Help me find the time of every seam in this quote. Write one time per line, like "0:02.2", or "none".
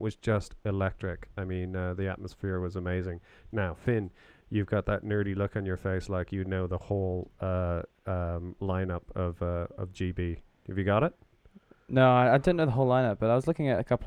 none